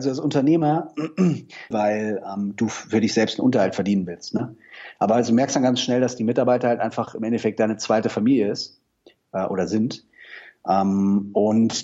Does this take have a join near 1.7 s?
yes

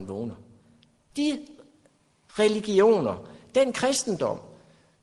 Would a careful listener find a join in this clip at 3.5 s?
no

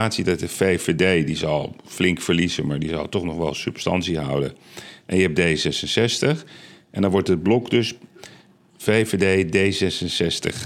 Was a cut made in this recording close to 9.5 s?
no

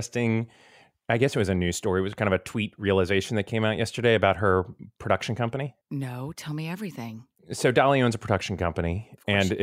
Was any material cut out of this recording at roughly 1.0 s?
no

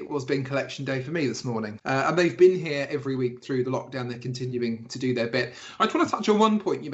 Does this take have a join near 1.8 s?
yes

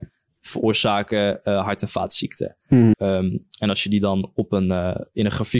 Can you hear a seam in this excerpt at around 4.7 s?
no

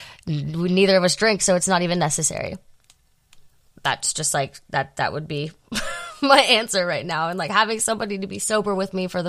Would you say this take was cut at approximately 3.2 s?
no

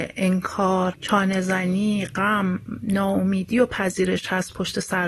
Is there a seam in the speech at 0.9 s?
yes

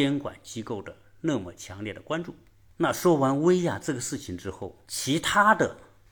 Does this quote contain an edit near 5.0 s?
no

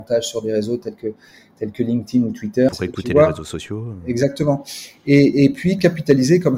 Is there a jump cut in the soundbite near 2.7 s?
yes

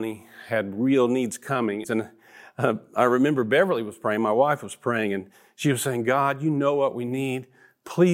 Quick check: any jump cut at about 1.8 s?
yes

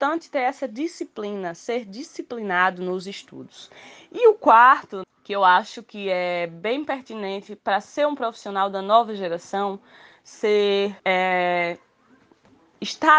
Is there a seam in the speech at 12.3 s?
no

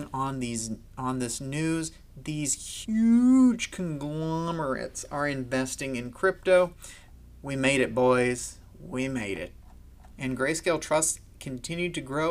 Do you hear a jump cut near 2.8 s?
yes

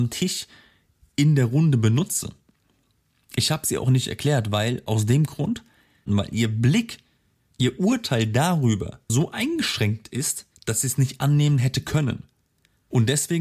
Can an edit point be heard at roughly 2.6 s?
no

